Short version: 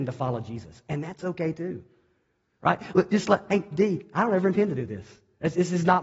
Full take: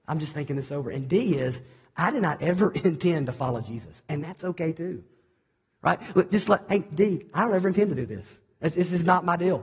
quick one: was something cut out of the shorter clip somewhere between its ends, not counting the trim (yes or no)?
no